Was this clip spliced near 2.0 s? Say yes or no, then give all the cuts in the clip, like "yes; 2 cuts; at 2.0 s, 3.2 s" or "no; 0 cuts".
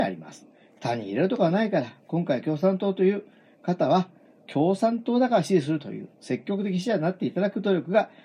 no; 0 cuts